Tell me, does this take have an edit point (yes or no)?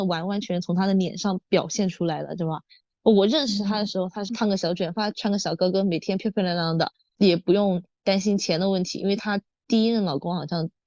no